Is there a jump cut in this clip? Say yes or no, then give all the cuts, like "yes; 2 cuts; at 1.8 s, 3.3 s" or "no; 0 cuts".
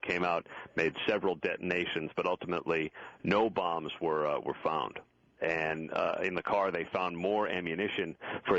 yes; 1 cut; at 5.4 s